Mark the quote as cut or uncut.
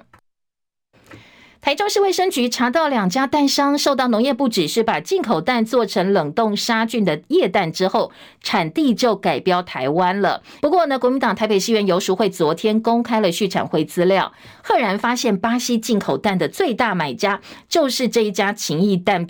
cut